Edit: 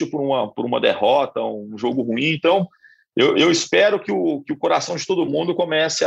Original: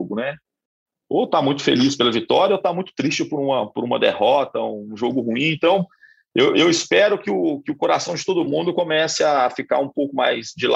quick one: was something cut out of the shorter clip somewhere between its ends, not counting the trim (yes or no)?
no